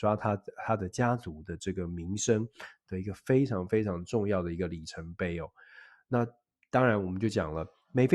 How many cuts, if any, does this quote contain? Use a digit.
0